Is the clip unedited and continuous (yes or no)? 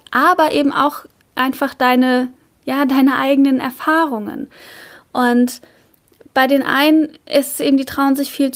yes